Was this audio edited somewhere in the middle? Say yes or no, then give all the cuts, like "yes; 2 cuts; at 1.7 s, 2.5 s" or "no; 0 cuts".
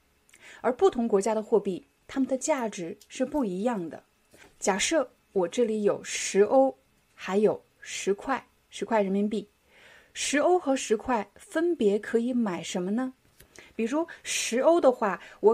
no; 0 cuts